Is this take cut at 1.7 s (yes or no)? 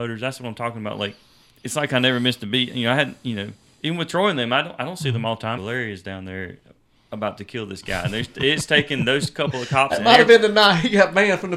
no